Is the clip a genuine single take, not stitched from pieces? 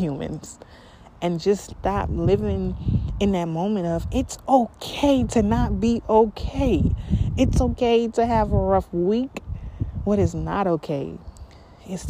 yes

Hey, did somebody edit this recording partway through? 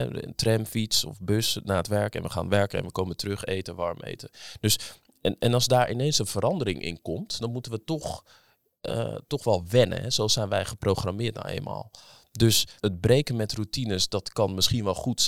no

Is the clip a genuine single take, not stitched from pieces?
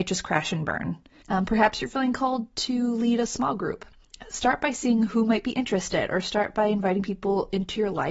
no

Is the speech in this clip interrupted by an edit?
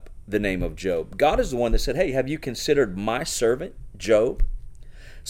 no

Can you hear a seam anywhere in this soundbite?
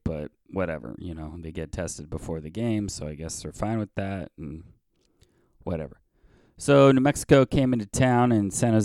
no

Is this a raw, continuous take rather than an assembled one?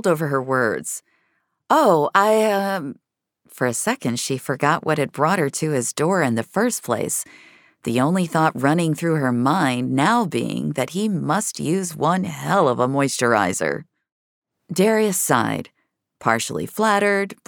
yes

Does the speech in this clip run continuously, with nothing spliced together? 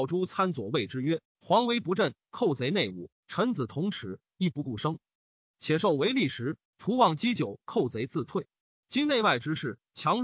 no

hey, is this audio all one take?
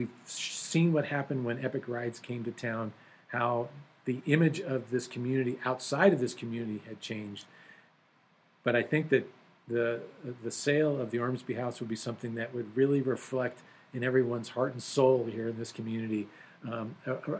yes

